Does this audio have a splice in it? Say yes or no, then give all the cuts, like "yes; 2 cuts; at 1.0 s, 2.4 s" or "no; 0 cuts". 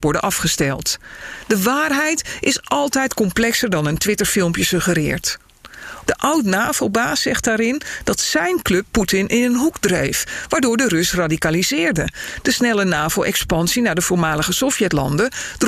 yes; 1 cut; at 6.1 s